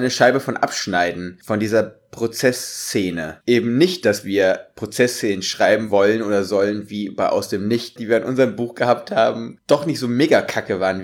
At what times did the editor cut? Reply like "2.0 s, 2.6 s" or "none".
3.4 s, 8.0 s